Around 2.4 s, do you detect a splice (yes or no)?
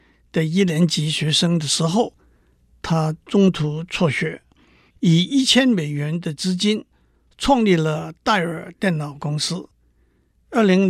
no